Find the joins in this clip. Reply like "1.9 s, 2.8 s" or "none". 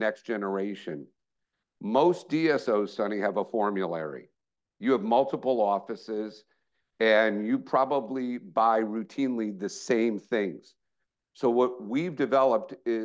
none